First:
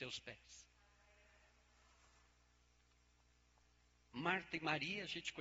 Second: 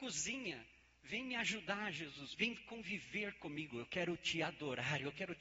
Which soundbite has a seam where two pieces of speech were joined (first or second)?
second